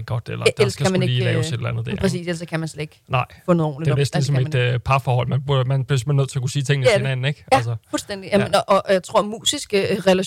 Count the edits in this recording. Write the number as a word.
zero